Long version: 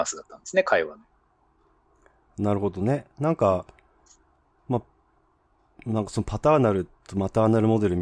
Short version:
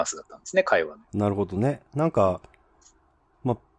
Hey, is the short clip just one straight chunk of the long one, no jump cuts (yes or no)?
no